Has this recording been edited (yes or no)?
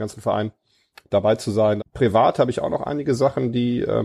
yes